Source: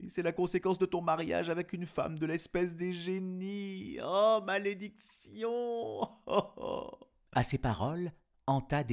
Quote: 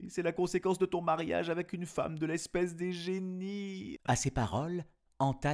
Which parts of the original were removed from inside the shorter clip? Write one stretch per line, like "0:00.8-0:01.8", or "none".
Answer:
0:04.0-0:07.2